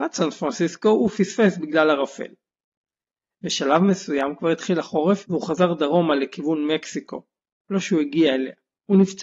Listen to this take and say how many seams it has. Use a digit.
0